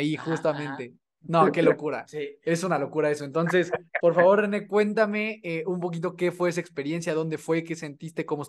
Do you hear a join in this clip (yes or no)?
no